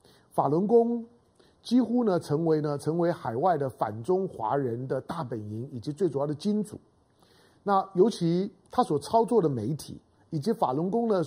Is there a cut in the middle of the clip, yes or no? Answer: no